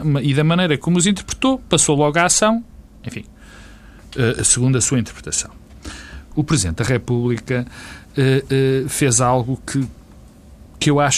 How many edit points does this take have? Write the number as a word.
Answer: one